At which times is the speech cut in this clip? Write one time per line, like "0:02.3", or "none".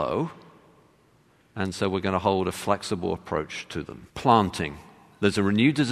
0:04.1